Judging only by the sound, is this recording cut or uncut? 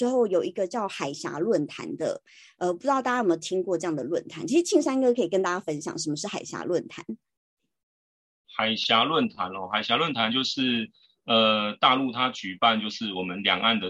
uncut